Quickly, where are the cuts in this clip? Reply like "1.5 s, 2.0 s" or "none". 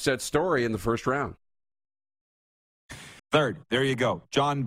3.2 s